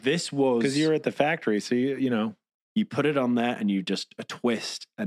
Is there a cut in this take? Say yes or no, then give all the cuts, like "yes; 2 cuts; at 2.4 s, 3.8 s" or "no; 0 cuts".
yes; 1 cut; at 2.6 s